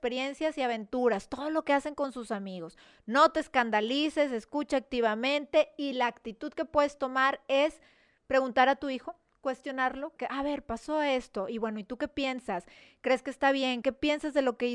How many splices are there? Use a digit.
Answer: 2